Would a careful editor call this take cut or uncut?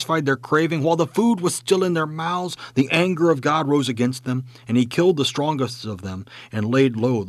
uncut